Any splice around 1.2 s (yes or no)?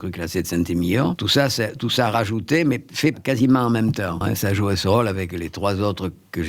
yes